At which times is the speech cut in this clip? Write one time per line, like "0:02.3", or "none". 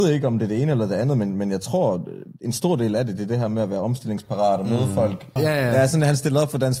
0:05.4